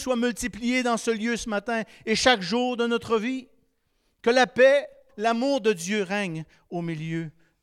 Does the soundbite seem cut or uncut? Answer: cut